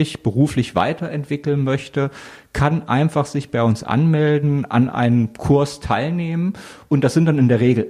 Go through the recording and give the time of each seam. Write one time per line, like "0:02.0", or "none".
none